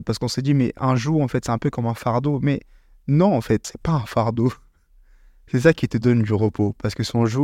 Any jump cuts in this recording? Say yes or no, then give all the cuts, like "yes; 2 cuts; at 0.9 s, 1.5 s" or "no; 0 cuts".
yes; 1 cut; at 3.6 s